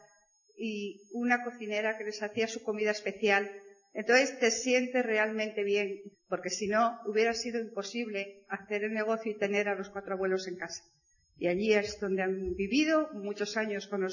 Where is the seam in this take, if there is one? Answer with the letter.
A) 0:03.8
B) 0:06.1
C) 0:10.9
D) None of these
B